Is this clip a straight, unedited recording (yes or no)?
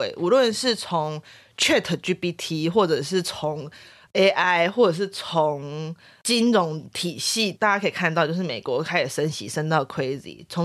yes